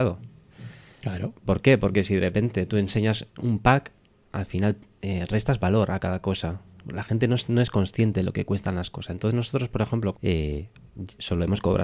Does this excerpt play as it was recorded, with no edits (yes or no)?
no